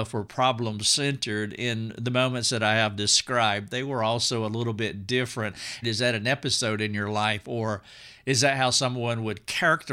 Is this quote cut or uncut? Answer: cut